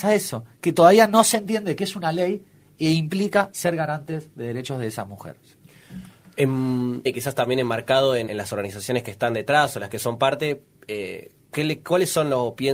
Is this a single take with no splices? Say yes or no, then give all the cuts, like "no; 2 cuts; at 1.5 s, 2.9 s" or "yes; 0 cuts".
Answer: no; 2 cuts; at 7.1 s, 8.3 s